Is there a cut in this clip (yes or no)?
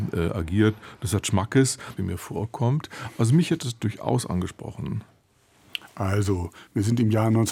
yes